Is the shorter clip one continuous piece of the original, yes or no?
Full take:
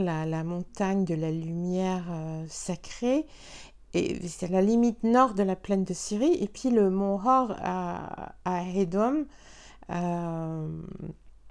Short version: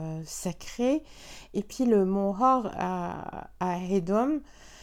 no